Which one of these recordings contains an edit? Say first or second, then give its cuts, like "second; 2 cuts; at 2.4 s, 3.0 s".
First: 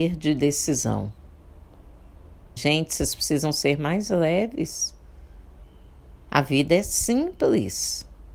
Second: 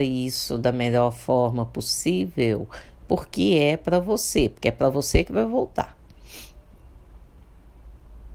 first; 1 cut; at 2.6 s